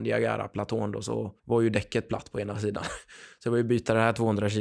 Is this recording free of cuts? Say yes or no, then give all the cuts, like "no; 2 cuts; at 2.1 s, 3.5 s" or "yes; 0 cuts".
no; 1 cut; at 1.4 s